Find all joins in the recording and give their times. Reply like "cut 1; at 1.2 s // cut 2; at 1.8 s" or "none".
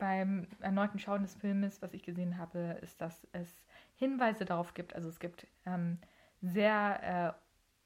none